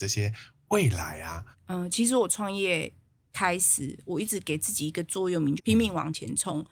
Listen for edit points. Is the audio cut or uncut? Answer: cut